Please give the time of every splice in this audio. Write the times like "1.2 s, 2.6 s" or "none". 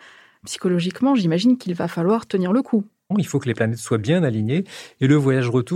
3.1 s